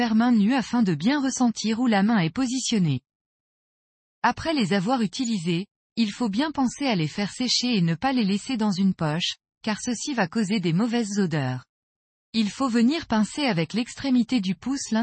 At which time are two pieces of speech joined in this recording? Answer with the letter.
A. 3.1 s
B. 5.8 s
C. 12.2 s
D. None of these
C